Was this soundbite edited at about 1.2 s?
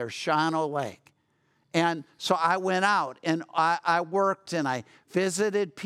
no; 0 cuts

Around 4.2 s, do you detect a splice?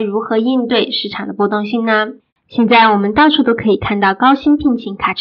no; 1 cut; at 2.3 s

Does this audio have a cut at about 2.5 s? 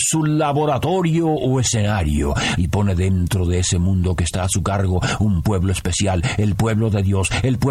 yes; 1 cut; at 2.5 s

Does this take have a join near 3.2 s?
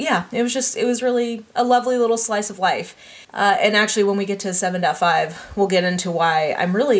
yes; 1 cut; at 3.2 s

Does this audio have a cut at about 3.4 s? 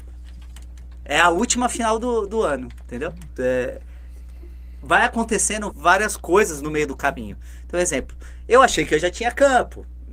yes; 3 cuts; at 2.3 s, 3.4 s, 5.7 s

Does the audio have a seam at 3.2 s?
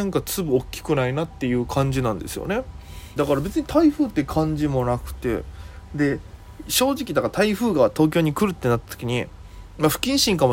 yes; 1 cut; at 3.2 s

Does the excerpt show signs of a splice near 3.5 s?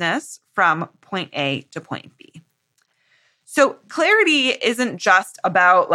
no; 0 cuts

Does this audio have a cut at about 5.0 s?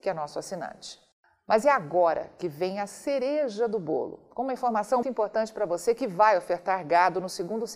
yes; 1 cut; at 5.0 s

